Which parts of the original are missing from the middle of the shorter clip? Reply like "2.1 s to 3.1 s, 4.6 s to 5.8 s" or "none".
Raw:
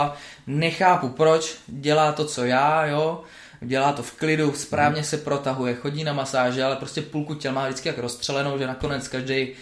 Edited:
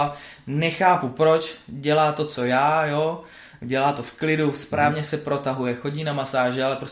none